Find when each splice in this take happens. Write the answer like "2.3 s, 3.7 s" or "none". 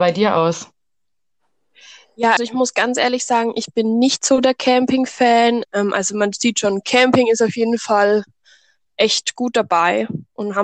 2.4 s, 5.6 s